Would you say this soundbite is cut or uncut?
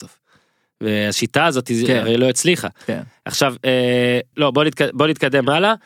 cut